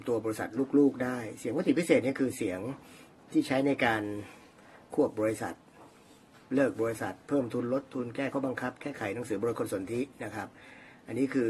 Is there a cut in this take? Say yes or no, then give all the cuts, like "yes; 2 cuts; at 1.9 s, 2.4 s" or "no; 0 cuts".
yes; 1 cut; at 8.3 s